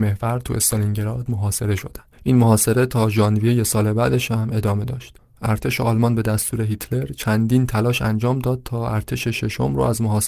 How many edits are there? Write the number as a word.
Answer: one